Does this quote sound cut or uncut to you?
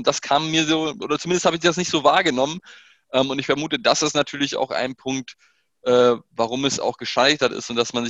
uncut